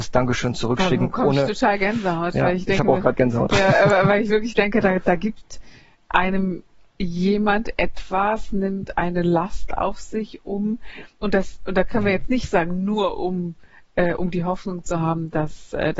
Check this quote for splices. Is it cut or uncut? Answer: uncut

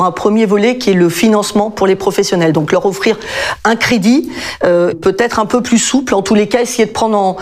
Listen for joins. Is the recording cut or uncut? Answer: cut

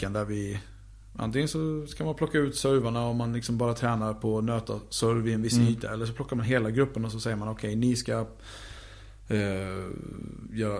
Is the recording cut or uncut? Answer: uncut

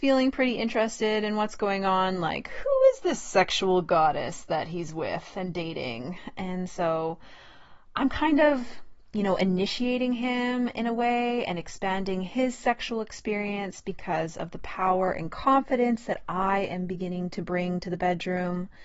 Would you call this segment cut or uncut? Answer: uncut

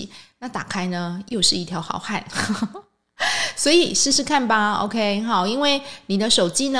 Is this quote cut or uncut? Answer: uncut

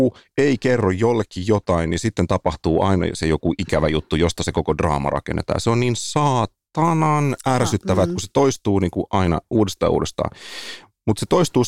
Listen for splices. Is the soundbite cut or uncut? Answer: uncut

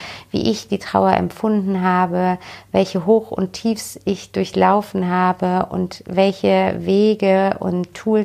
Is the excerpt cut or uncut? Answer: uncut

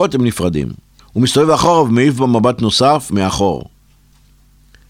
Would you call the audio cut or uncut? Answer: cut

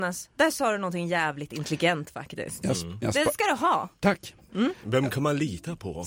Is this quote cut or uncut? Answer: uncut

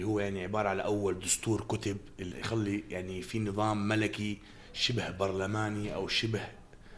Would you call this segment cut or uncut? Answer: cut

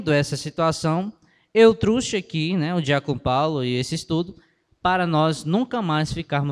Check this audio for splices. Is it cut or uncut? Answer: uncut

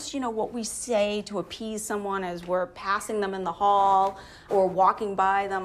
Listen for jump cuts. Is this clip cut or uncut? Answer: cut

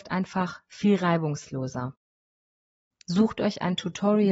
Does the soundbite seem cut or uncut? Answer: cut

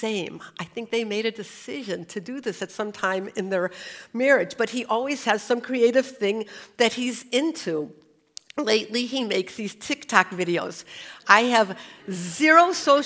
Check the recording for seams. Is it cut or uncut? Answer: uncut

